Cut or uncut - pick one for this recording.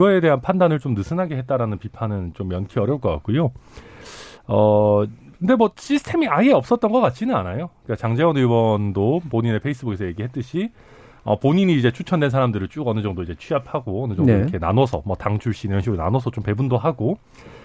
uncut